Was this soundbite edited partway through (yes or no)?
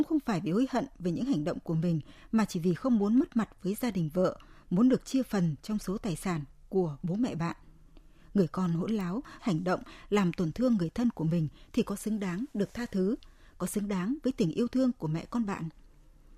yes